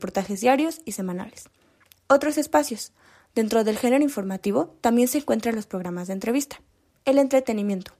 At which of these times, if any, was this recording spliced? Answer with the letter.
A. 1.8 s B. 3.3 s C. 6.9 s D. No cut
C